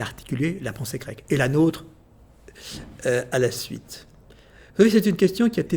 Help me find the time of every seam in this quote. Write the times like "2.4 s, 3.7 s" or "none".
none